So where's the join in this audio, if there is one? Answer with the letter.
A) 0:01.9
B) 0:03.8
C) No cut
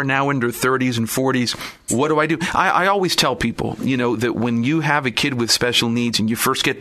A